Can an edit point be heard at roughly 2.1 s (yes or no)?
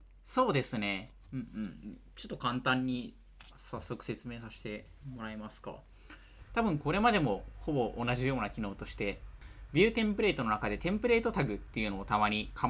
no